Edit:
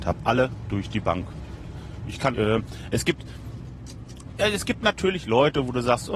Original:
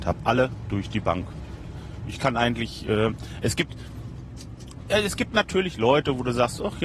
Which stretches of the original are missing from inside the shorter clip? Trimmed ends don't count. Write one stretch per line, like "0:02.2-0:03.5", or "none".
0:02.3-0:02.8

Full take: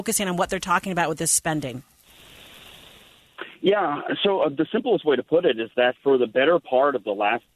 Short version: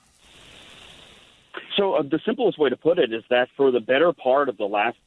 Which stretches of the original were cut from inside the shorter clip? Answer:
0:03.5-0:04.2

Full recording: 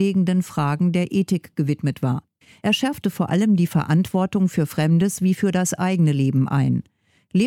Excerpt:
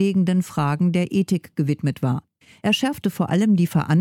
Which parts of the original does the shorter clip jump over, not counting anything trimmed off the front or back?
none

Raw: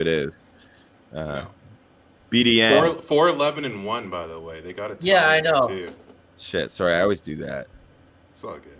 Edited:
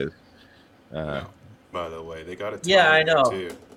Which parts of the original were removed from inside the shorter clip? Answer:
0:01.9-0:04.1

